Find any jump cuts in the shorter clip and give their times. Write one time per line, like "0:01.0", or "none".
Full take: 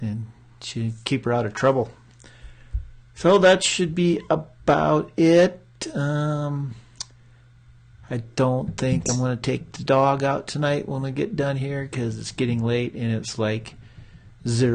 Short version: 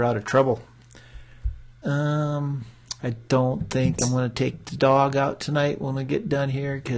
0:01.8
0:03.0